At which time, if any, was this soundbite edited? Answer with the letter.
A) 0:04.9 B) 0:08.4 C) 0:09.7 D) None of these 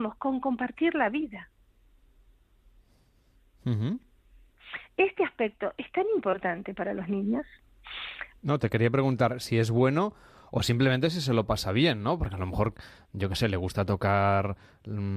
B